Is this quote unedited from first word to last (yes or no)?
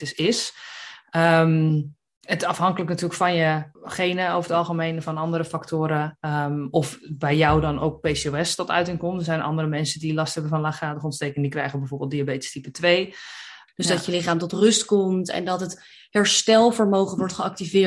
no